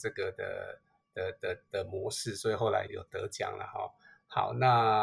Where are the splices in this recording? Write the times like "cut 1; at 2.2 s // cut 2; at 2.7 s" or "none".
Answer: cut 1; at 2.9 s